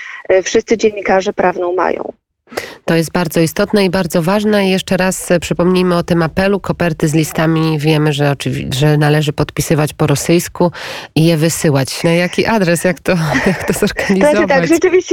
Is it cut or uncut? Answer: cut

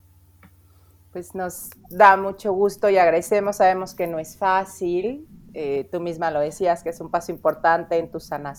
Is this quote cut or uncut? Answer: uncut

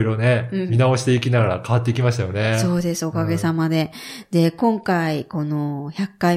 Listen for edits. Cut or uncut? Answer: uncut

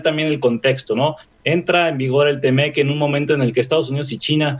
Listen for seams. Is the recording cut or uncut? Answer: uncut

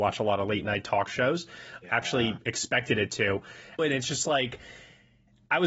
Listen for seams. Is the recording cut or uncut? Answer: cut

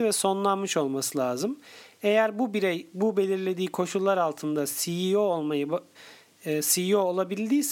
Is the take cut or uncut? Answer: uncut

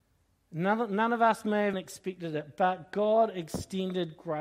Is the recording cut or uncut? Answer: cut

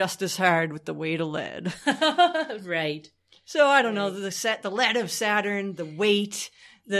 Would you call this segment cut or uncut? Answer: uncut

